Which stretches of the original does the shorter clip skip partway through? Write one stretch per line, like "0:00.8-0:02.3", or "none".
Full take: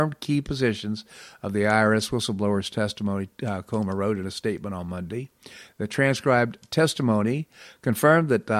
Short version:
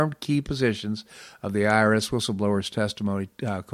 none